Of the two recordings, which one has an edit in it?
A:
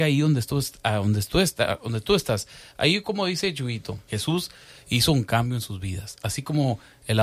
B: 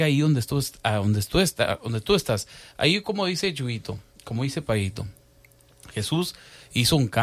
A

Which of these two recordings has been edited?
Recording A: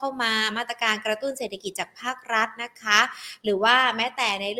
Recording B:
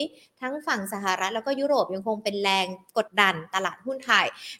B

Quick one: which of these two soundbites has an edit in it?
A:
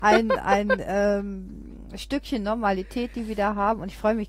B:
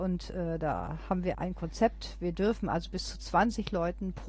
B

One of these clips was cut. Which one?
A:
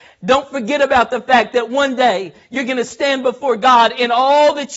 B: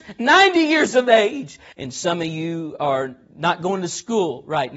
B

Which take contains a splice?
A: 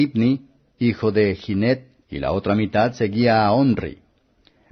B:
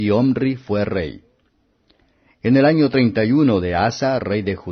A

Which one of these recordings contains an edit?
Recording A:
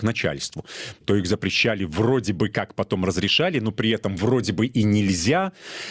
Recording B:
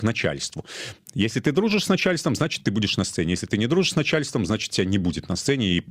A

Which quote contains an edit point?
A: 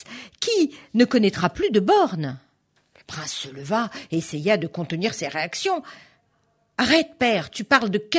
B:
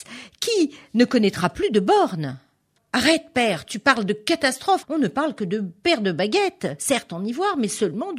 B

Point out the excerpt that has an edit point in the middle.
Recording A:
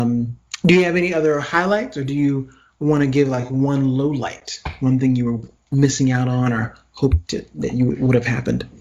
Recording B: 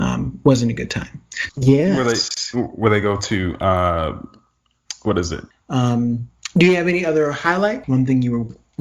B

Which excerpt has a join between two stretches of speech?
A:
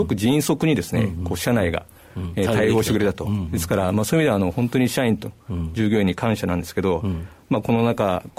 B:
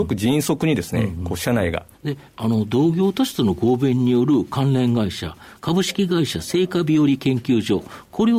B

